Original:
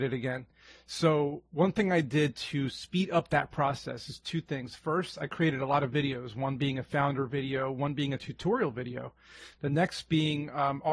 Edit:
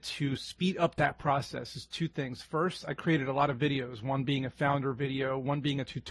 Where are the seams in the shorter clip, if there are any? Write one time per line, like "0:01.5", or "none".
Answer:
none